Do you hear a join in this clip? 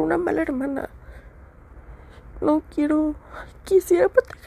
yes; 1 cut; at 2.3 s

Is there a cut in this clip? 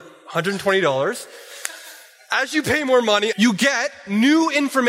yes; 1 cut; at 3.3 s

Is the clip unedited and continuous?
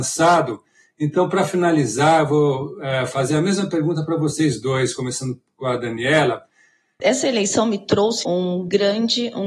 no; 2 cuts; at 7.0 s, 8.2 s

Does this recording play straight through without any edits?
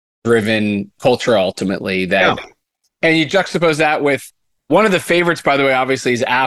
no; 1 cut; at 2.8 s

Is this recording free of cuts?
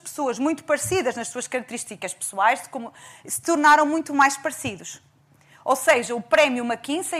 yes; 0 cuts

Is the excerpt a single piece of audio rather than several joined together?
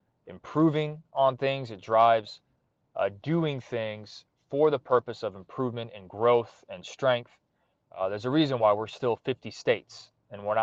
no; 1 cut; at 7.8 s

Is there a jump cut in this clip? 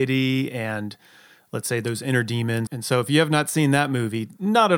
yes; 1 cut; at 2.7 s

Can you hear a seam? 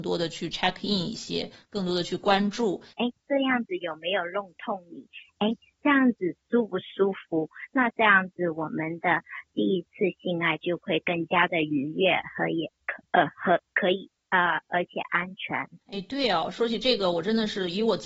yes; 2 cuts; at 2.9 s, 15.8 s

